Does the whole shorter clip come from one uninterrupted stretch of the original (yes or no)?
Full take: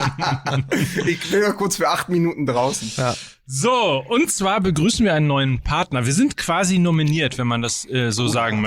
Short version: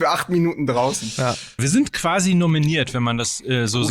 no